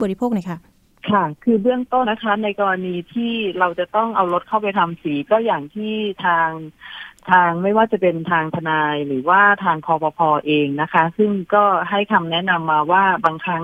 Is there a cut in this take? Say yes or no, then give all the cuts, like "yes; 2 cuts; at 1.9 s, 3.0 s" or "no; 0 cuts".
yes; 1 cut; at 2.0 s